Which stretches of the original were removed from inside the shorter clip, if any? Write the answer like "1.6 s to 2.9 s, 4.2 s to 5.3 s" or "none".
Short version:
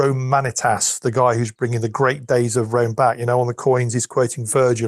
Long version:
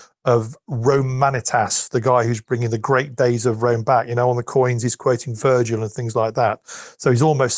none